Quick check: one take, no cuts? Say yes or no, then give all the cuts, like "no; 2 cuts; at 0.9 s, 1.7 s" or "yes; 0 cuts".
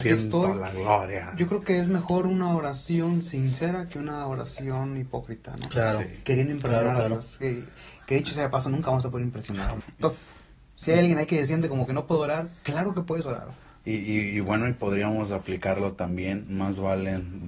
no; 1 cut; at 9.8 s